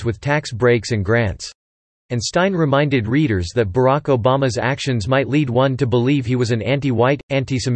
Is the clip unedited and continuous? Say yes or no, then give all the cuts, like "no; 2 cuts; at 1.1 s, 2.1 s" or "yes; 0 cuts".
no; 1 cut; at 2.0 s